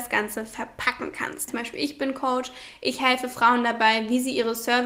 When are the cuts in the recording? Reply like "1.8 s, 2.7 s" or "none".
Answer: 1.5 s